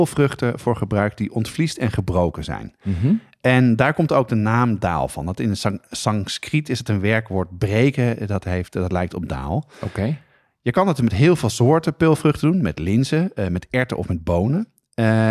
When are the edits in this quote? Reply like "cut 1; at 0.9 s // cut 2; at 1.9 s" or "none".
none